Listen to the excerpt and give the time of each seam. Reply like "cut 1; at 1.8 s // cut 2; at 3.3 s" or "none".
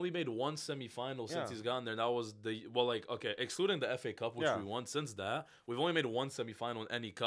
none